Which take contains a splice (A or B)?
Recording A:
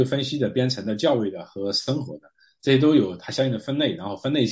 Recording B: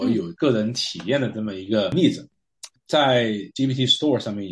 B